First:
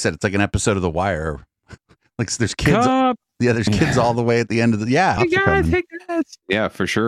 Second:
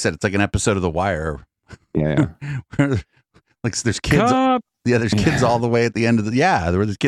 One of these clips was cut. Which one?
first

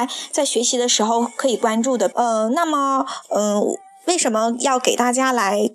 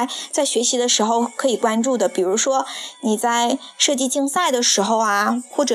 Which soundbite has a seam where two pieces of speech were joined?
first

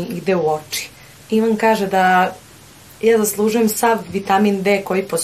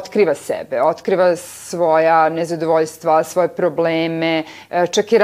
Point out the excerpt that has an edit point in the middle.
first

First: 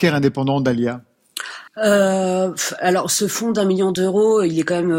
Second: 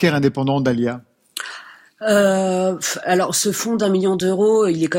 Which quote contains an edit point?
first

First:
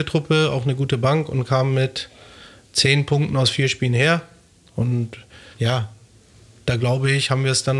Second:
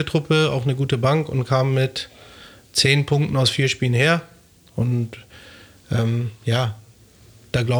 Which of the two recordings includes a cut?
first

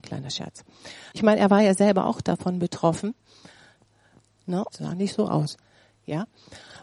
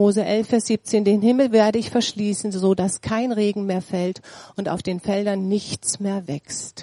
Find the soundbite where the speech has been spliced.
first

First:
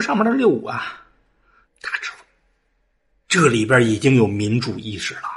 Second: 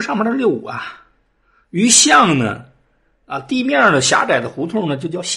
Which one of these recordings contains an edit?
first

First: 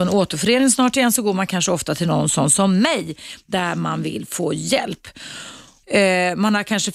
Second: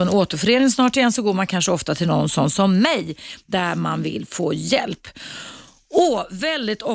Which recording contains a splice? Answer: first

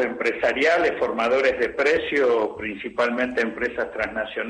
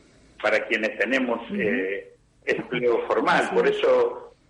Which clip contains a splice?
second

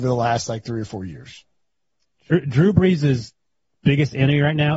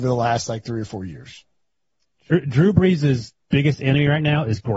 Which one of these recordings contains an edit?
second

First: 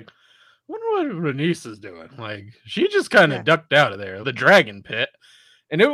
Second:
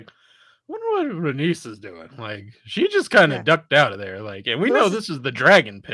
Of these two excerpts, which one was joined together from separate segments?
first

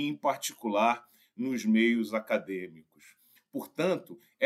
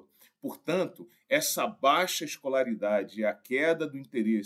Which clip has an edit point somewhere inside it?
first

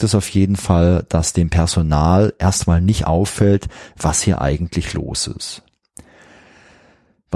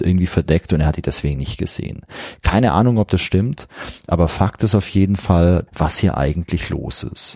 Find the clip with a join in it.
second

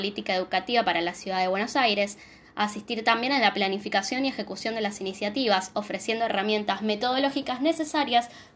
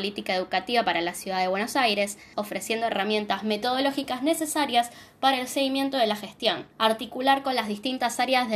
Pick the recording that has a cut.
second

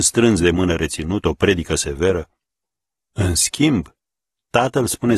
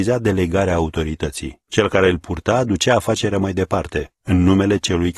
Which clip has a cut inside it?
second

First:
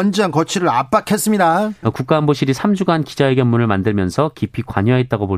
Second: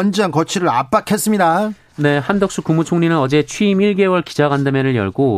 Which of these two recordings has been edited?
first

